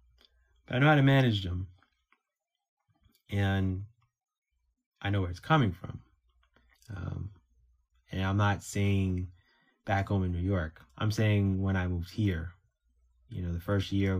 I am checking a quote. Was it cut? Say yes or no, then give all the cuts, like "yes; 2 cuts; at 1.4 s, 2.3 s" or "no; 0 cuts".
yes; 2 cuts; at 6.7 s, 10.9 s